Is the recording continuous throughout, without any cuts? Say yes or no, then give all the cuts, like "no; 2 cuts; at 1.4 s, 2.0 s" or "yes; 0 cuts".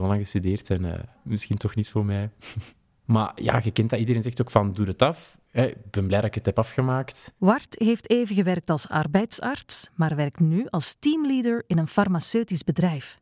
yes; 0 cuts